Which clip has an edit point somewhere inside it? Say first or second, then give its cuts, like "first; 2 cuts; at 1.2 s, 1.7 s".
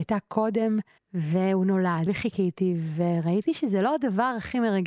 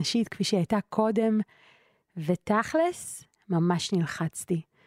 first; 2 cuts; at 1.0 s, 2.1 s